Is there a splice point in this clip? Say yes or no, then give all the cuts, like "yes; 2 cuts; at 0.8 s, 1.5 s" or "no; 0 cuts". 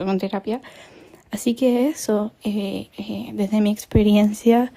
yes; 1 cut; at 2.9 s